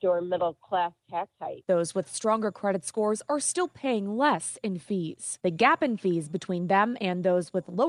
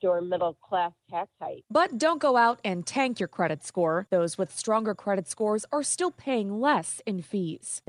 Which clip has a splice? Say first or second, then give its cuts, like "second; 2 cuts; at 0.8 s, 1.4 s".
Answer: first; 1 cut; at 1.6 s